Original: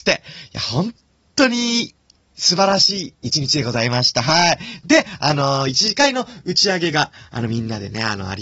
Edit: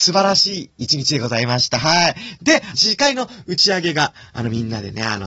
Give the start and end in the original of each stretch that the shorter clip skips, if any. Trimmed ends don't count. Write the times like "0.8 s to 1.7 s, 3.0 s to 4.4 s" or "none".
5.2 s to 5.7 s